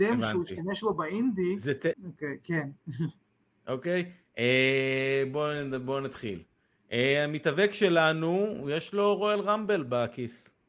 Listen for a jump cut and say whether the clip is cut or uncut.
cut